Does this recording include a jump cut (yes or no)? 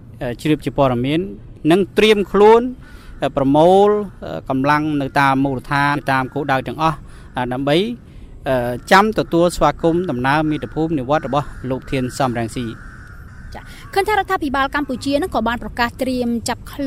yes